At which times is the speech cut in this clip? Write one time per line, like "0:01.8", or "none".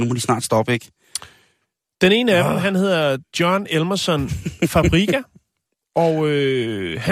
none